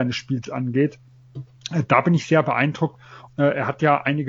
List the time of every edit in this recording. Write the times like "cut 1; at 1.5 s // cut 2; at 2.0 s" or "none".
cut 1; at 3.3 s

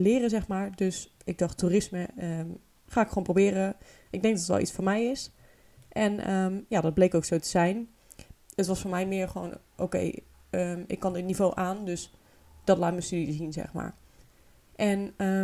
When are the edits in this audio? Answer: cut 1; at 8.3 s

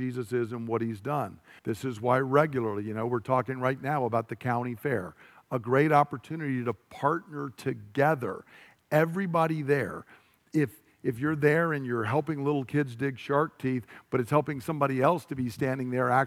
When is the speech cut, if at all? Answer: cut 1; at 1.6 s

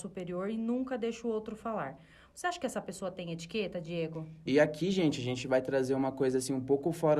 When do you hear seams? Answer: cut 1; at 4.5 s

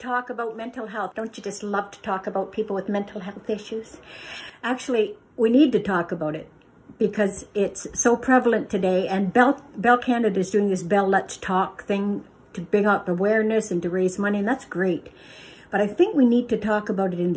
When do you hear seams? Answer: cut 1; at 1.1 s // cut 2; at 5.2 s

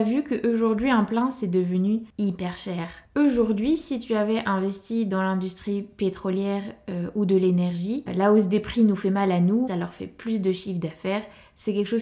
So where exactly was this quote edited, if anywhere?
cut 1; at 8.1 s // cut 2; at 9.7 s

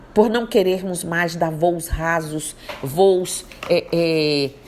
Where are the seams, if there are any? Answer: none

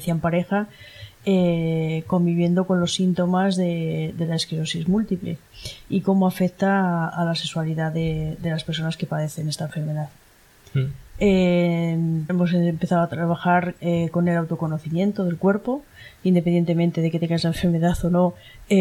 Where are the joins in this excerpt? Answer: cut 1; at 12.3 s

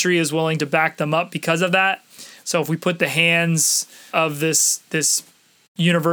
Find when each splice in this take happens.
cut 1; at 2.4 s // cut 2; at 4.1 s

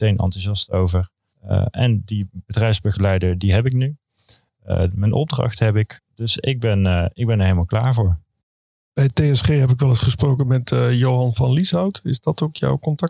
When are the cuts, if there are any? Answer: none

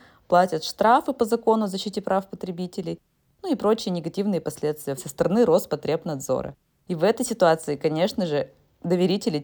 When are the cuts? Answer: cut 1; at 5.0 s // cut 2; at 6.8 s

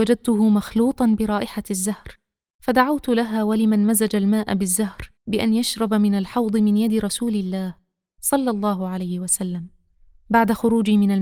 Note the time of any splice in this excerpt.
cut 1; at 5.2 s

